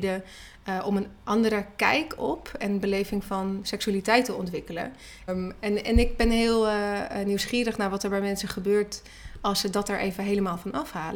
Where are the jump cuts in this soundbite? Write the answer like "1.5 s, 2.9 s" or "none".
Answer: 5.3 s